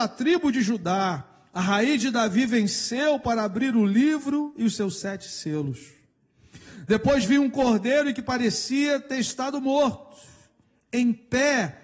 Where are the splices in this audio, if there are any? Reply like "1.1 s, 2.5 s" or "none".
none